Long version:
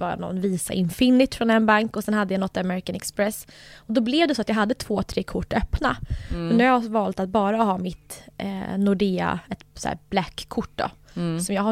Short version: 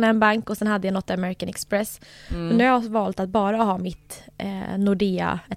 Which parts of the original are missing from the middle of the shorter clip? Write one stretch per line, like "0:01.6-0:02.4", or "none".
0:03.7-0:06.3